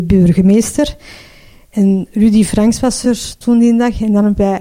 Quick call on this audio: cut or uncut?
uncut